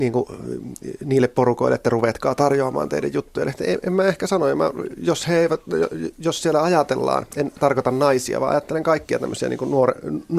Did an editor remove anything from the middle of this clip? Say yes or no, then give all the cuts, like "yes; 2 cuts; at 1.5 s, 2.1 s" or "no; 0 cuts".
no; 0 cuts